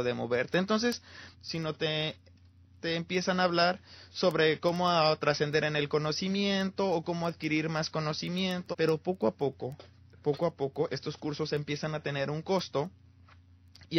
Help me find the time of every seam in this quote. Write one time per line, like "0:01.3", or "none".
0:01.3
0:08.7
0:10.9